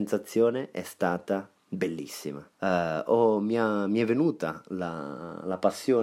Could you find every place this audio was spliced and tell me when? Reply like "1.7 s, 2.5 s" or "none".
2.5 s